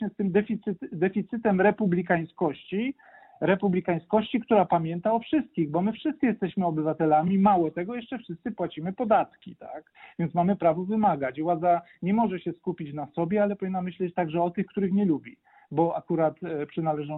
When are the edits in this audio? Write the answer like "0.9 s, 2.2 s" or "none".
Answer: none